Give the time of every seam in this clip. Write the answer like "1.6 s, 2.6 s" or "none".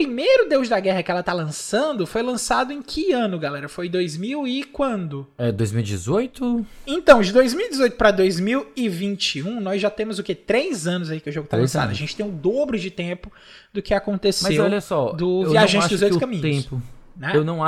none

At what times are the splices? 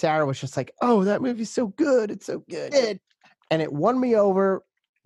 2.7 s

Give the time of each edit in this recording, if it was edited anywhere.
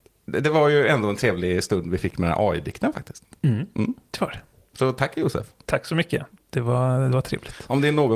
none

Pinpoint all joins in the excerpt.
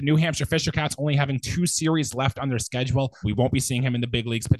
3.2 s

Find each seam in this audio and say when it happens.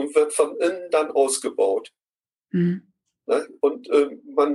none

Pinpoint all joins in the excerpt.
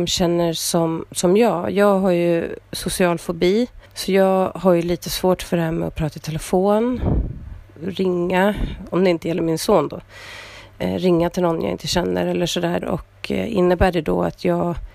3.9 s, 12.8 s

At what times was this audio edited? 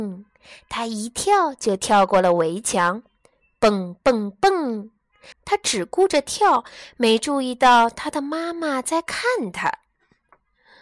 5.3 s

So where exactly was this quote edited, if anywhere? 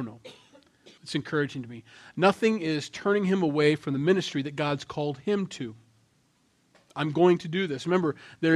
1.0 s

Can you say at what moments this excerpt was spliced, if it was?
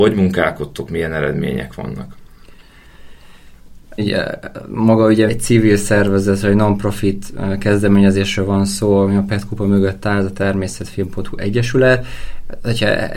4.0 s, 5.3 s

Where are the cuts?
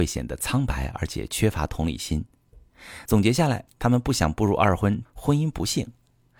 3.1 s, 5.0 s

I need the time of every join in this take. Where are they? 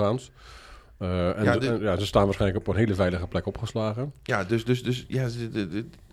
none

